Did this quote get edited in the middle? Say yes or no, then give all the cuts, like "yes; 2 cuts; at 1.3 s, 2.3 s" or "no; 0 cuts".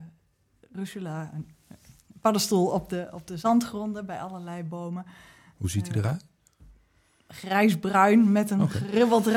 no; 0 cuts